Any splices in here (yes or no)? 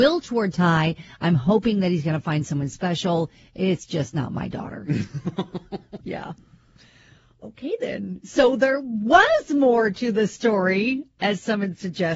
yes